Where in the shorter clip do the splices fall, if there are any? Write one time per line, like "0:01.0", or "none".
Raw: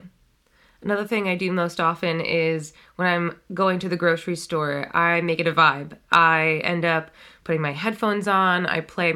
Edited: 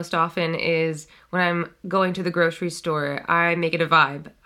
none

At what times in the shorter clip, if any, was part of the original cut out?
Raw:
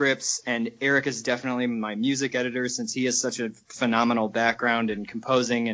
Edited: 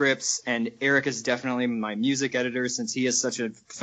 none

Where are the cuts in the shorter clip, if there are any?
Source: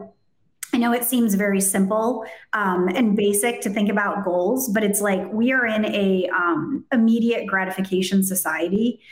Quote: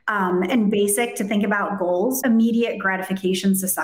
0:02.2

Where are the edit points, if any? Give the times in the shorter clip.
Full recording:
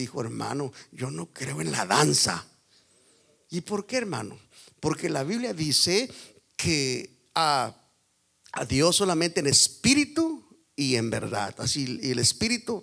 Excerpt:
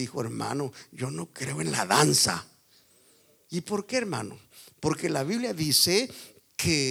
none

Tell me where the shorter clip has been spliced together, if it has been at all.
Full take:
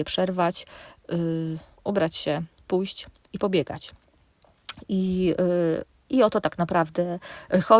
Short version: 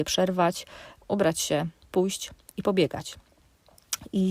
0:01.0

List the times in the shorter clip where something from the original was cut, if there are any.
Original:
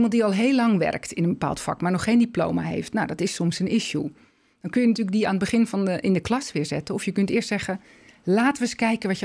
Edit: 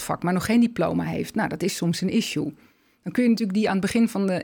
none

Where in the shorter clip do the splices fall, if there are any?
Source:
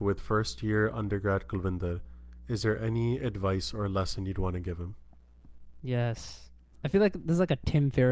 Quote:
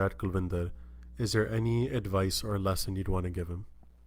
none

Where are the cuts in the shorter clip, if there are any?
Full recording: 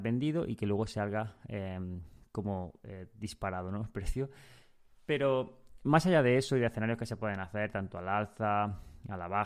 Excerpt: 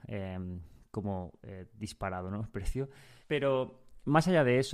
0:03.2

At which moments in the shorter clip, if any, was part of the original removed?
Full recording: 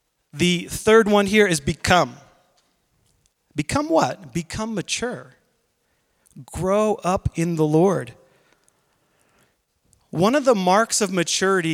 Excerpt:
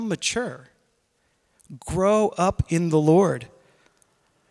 none

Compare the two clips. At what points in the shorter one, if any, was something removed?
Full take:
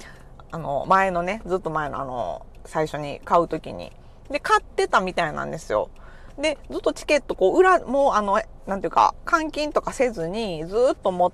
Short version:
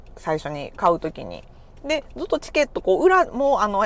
0:01.8

